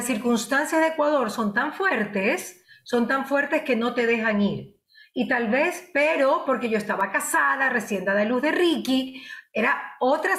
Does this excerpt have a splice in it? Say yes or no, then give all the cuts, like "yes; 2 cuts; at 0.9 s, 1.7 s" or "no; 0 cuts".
no; 0 cuts